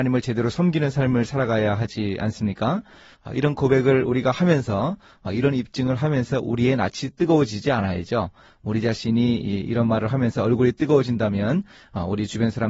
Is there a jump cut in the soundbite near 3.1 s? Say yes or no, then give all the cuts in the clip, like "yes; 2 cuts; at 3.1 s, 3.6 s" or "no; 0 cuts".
yes; 1 cut; at 3.1 s